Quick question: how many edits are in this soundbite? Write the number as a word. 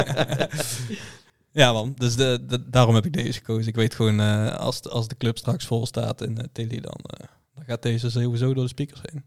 zero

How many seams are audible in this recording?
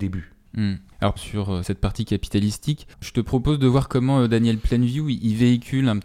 two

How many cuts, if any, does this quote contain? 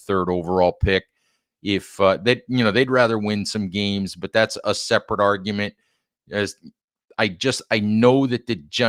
zero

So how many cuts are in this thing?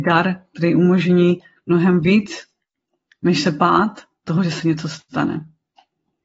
zero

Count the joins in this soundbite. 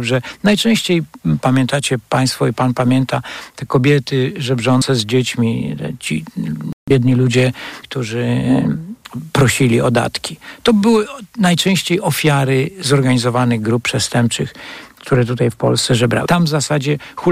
two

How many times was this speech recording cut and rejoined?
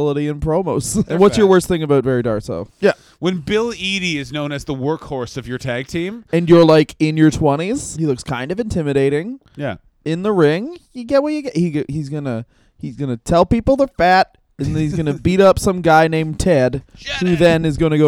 three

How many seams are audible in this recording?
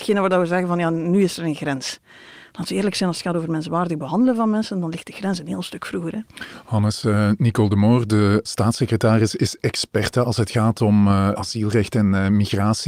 zero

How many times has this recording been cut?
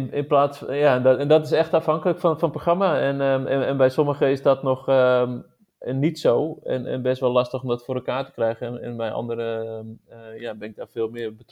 zero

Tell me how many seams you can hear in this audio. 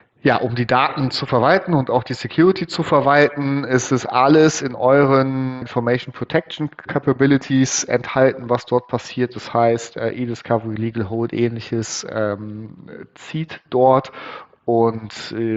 one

